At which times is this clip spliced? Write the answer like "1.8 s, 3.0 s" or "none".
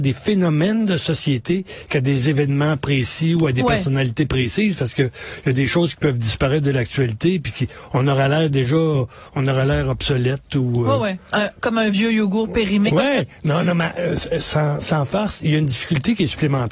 12.9 s